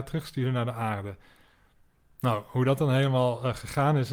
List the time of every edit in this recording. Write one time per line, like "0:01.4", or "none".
none

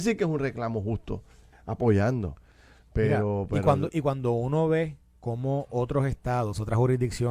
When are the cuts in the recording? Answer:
0:01.5

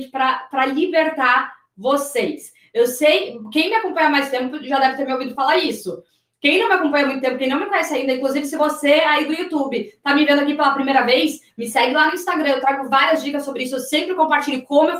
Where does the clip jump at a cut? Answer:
none

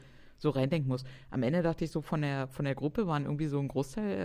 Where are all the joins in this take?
none

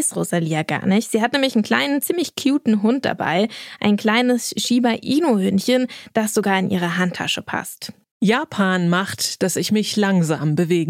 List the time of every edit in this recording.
0:08.1

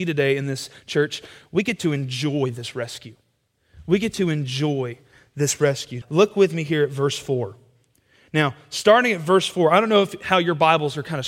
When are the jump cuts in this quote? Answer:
0:06.0

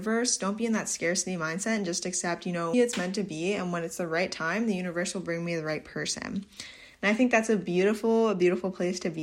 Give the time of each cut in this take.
0:02.7

